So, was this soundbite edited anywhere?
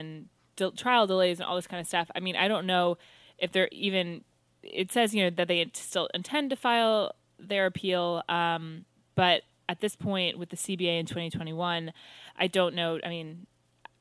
no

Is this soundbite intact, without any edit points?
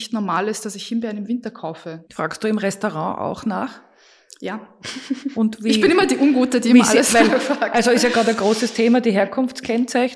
no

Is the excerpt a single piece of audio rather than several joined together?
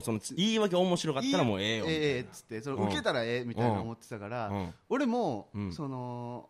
yes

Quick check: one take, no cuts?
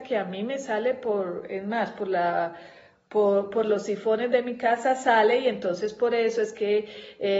yes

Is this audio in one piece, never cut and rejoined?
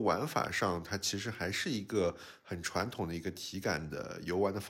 yes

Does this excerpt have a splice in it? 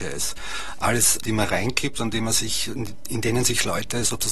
yes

